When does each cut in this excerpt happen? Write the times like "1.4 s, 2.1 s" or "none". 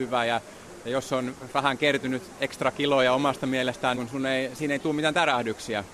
3.9 s